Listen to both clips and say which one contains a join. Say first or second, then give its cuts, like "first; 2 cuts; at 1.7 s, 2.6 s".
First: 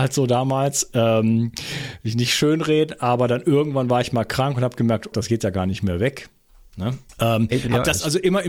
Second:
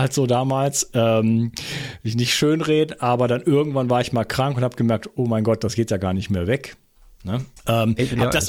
first; 1 cut; at 5.1 s